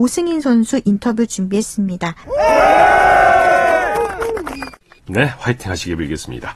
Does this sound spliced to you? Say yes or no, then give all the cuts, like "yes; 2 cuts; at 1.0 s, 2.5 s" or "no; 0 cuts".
yes; 2 cuts; at 2.2 s, 5.0 s